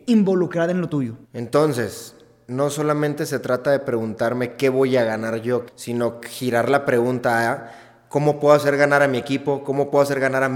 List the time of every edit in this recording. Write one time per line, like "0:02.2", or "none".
0:01.2
0:05.7